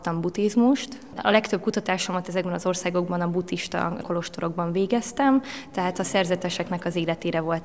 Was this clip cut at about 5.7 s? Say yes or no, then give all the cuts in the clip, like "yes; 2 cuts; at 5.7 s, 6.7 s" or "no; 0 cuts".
no; 1 cut; at 1.1 s